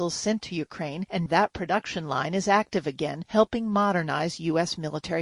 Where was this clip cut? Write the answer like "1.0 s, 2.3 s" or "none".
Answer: 1.3 s